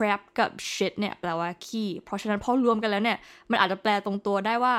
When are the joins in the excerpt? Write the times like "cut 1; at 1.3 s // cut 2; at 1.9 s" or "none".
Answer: none